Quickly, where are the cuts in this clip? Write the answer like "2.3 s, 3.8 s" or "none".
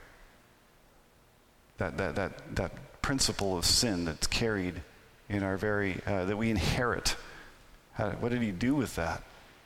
none

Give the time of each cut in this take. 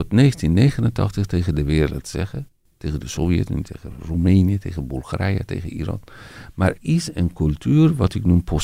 6.8 s

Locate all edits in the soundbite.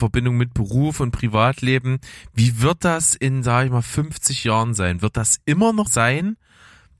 5.9 s

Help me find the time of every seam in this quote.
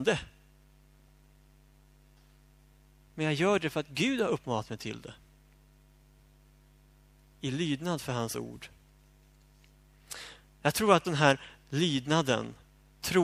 11.0 s

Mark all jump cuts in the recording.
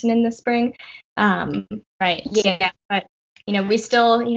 none

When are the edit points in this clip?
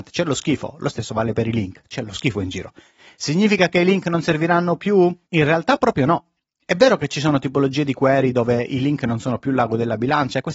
none

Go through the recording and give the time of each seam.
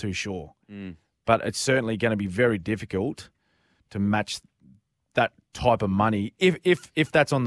none

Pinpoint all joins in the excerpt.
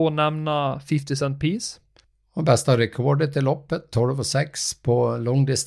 none

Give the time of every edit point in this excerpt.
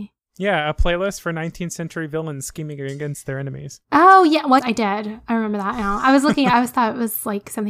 4.6 s

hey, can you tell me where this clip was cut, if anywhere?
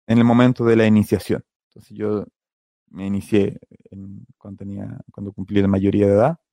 none

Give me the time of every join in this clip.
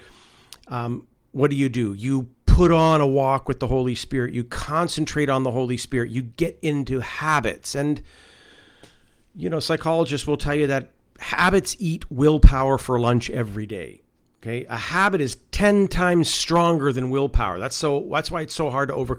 none

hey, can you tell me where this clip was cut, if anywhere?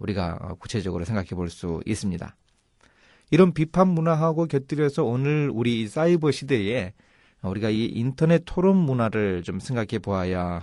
none

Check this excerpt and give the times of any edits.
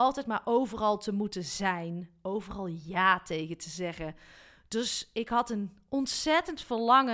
none

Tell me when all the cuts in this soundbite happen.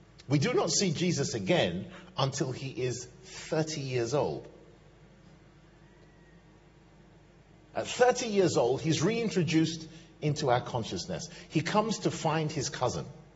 none

